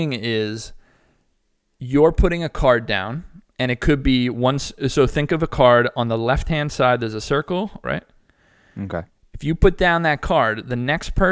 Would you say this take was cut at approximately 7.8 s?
yes; 1 cut; at 7.8 s

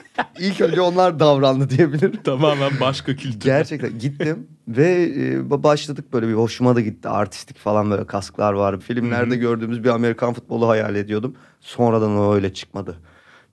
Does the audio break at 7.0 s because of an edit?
no; 1 cut; at 8.8 s

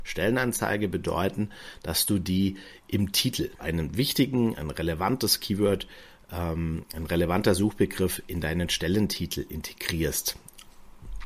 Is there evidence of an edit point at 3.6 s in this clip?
yes; 1 cut; at 3.6 s

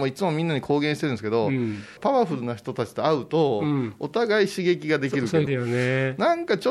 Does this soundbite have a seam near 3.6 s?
no; 2 cuts; at 2.0 s, 5.5 s

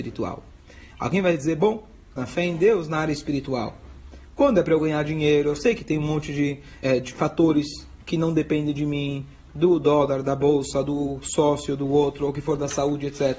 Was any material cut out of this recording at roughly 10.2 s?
no; 2 cuts; at 2.2 s, 6.8 s

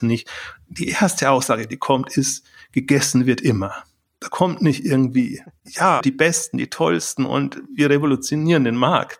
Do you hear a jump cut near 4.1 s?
no; 1 cut; at 6.0 s

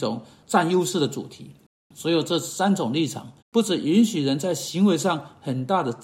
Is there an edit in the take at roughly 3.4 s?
yes; 2 cuts; at 1.8 s, 3.4 s

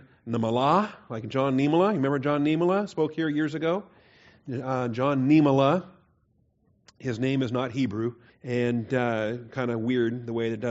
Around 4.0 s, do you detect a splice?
no; 1 cut; at 8.3 s

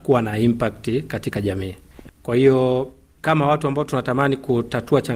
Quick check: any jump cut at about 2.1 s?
yes; 1 cut; at 2.1 s

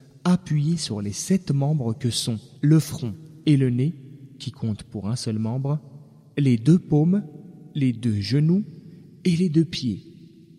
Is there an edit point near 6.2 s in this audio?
no; 1 cut; at 2.6 s

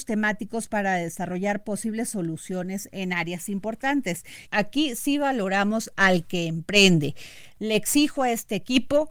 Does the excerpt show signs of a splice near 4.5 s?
yes; 1 cut; at 4.5 s

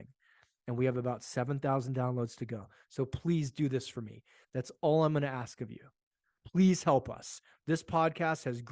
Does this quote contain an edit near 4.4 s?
yes; 1 cut; at 4.4 s

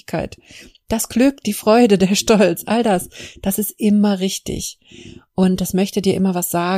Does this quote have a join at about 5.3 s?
no; 0 cuts

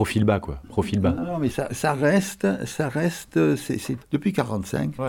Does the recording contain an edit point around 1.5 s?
yes; 2 cuts; at 1.5 s, 4.0 s

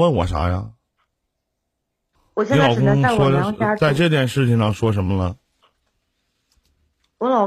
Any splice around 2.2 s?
yes; 1 cut; at 2.2 s

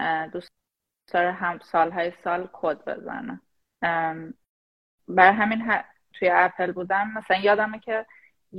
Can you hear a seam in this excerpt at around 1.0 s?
no; 1 cut; at 6.1 s

